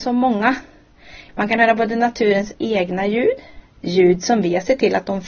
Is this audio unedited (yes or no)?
no